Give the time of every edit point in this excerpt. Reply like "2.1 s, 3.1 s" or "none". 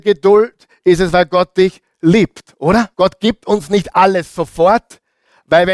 2.9 s